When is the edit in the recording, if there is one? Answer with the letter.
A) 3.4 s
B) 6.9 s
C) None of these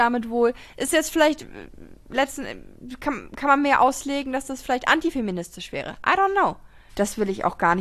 B